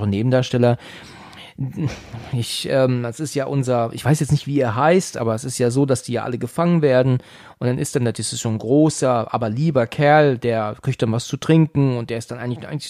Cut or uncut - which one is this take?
uncut